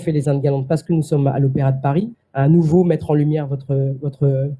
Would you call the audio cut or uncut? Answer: cut